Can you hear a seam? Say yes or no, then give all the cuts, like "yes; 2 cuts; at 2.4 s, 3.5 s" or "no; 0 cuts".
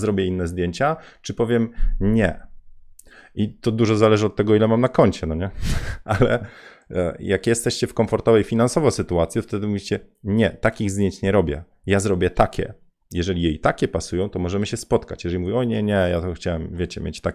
no; 0 cuts